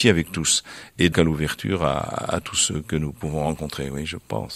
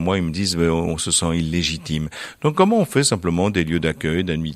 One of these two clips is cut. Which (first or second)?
first